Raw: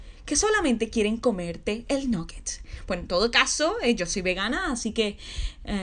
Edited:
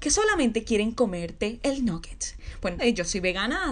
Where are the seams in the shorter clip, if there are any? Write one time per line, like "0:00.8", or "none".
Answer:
0:02.8